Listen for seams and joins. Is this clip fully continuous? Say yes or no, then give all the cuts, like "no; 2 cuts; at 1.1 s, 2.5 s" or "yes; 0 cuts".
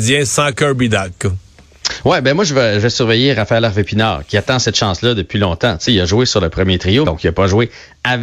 no; 2 cuts; at 5.9 s, 7.0 s